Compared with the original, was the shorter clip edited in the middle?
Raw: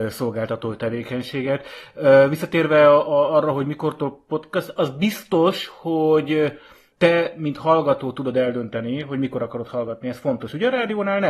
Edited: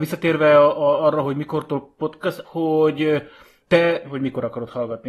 yes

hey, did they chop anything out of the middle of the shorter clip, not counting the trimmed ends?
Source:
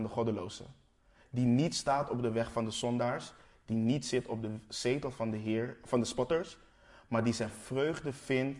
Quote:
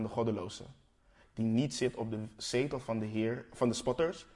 yes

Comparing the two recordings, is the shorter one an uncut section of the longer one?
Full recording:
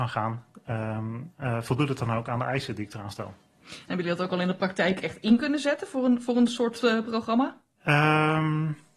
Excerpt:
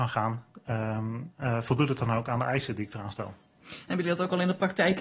yes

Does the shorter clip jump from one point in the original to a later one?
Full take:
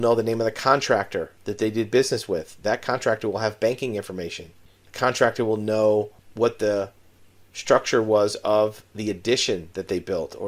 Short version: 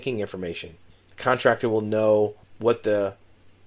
no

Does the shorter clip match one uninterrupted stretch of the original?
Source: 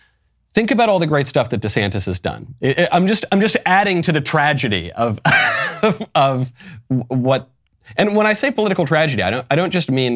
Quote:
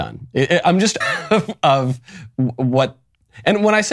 no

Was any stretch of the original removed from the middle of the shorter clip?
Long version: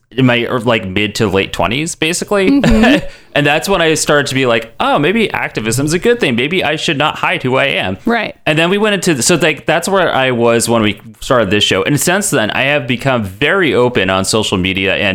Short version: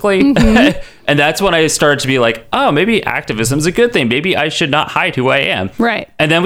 no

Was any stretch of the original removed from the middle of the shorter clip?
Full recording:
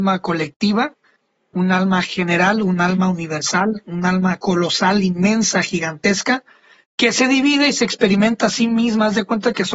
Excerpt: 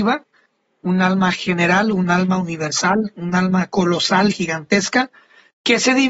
yes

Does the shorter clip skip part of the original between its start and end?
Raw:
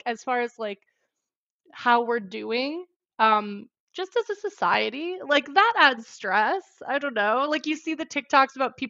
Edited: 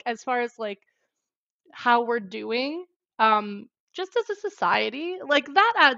no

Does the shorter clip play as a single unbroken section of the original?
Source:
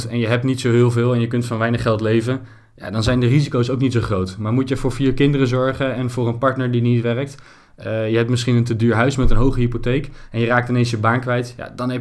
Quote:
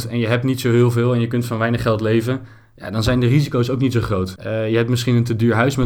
no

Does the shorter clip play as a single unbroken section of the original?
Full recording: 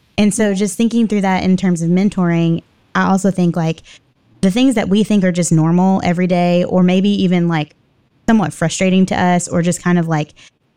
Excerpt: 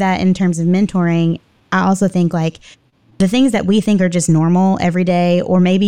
yes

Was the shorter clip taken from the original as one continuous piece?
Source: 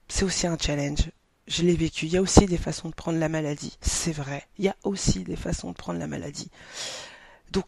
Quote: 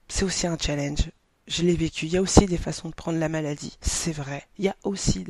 yes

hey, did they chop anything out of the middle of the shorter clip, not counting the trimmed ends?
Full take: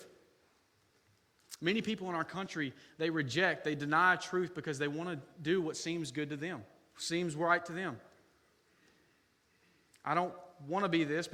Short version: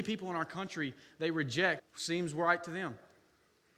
yes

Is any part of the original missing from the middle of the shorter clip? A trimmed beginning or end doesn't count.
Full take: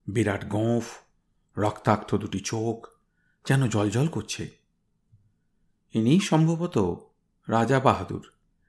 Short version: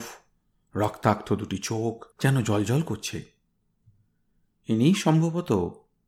yes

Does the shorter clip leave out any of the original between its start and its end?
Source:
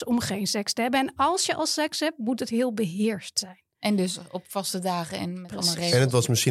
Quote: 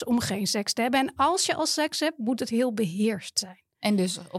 no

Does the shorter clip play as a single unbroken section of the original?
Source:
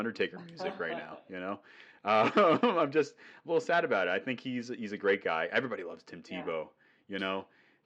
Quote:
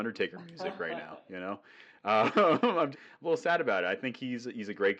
no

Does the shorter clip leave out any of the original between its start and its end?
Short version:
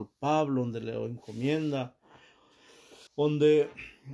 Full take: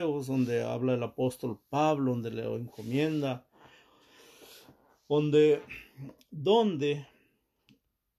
yes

